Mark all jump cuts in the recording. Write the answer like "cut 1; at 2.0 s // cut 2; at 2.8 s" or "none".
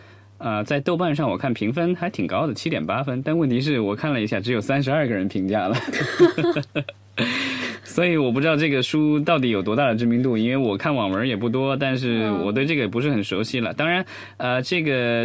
none